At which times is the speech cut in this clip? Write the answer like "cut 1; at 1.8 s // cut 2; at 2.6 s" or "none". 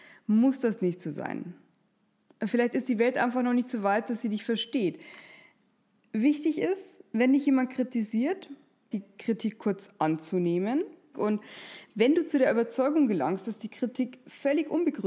cut 1; at 8.9 s // cut 2; at 11.1 s

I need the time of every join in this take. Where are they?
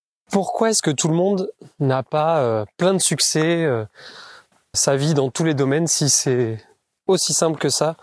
cut 1; at 4.7 s

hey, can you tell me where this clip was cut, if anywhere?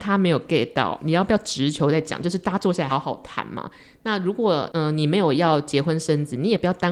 cut 1; at 2.9 s

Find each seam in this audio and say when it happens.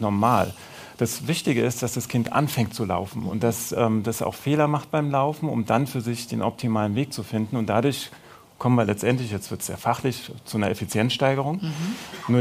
none

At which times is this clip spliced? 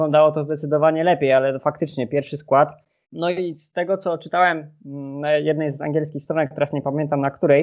cut 1; at 3.0 s

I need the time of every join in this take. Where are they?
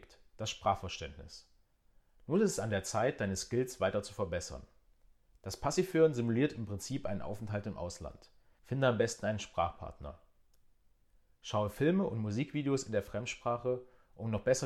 cut 1; at 5.3 s // cut 2; at 8.6 s

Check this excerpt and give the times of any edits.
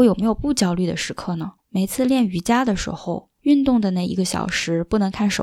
cut 1; at 1.6 s

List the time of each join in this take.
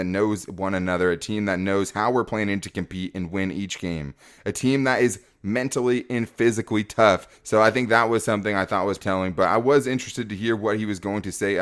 cut 1; at 7.3 s // cut 2; at 9.0 s

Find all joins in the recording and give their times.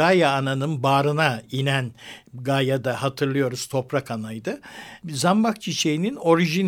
cut 1; at 5.0 s

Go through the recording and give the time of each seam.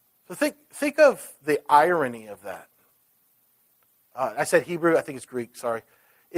none

